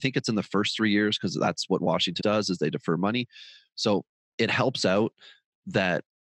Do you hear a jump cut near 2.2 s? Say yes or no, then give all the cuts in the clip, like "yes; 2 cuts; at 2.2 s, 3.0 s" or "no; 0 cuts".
yes; 1 cut; at 2.2 s